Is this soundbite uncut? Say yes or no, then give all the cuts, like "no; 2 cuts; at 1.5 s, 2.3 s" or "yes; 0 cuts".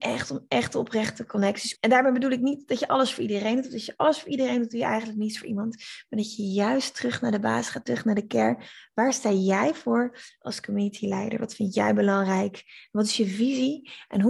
no; 1 cut; at 1.8 s